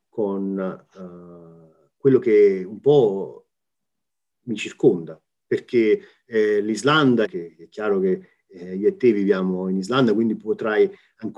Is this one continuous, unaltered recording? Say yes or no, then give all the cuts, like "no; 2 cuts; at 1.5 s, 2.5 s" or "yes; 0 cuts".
no; 1 cut; at 7.3 s